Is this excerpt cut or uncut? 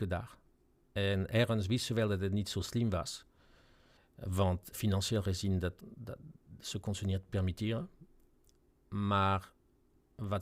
cut